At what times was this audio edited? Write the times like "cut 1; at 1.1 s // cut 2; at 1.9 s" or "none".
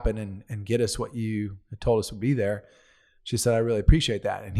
none